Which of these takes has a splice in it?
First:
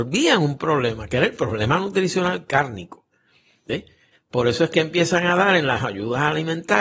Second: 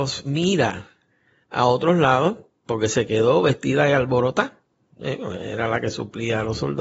first; 1 cut; at 4.1 s

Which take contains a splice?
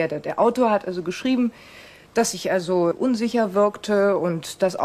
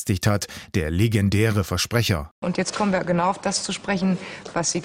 first; 1 cut; at 2.9 s

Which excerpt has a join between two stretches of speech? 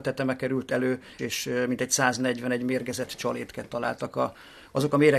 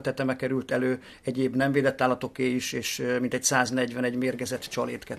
first; 1 cut; at 1.2 s

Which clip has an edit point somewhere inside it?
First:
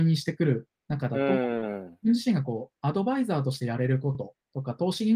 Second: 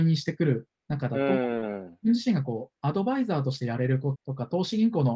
second; 1 cut; at 4.1 s

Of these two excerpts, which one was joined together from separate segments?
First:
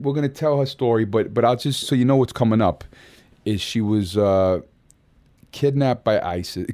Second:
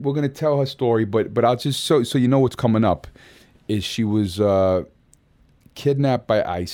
first; 1 cut; at 1.8 s

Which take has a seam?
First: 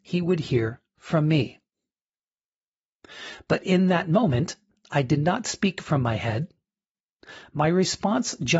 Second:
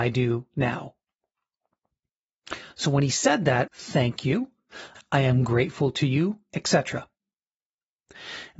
second; 2 cuts; at 3.7 s, 4.9 s

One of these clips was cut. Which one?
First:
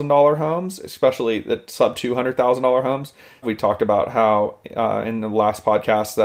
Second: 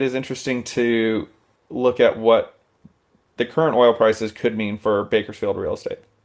first; 1 cut; at 3.4 s

